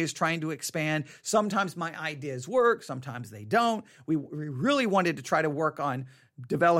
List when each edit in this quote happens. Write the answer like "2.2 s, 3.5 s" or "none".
none